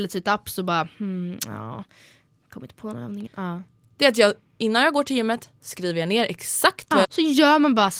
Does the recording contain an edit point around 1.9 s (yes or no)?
no